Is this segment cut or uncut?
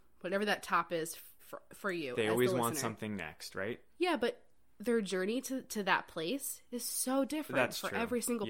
cut